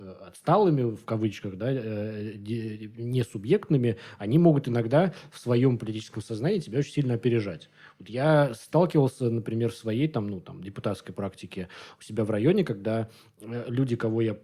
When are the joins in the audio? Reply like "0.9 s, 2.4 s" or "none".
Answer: none